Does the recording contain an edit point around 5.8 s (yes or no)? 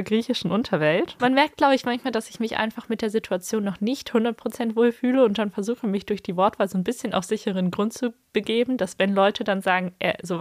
no